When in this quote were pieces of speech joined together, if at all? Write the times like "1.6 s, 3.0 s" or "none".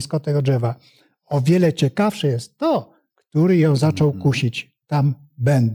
3.1 s